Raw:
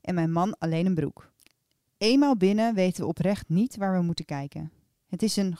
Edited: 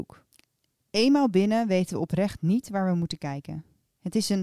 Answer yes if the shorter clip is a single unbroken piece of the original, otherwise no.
yes